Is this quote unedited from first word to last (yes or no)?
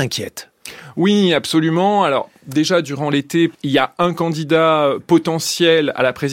no